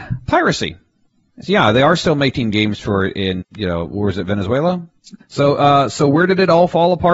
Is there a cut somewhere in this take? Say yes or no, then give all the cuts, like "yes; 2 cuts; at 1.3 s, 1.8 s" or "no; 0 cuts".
yes; 2 cuts; at 3.4 s, 5.2 s